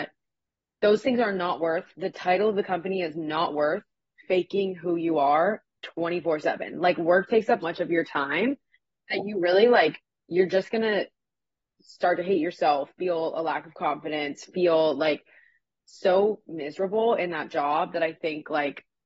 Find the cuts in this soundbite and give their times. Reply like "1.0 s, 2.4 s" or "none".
7.6 s